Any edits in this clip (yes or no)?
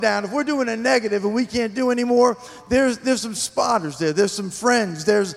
no